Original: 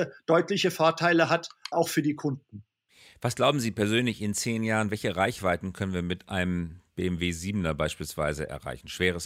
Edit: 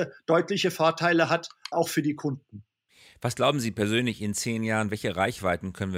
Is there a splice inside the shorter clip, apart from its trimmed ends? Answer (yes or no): no